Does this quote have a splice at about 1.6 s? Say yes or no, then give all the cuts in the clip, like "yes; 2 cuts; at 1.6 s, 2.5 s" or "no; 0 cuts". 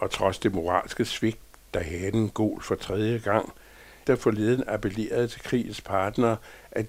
no; 1 cut; at 4.0 s